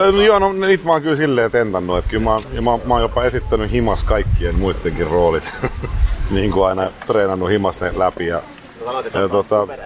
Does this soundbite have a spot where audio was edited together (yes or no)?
no